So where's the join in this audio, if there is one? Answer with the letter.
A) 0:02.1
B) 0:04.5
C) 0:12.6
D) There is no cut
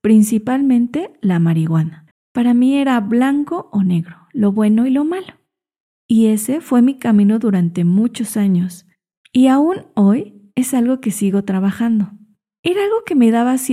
A